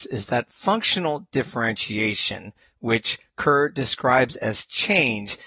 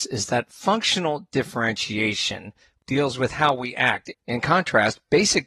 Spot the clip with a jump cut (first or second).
second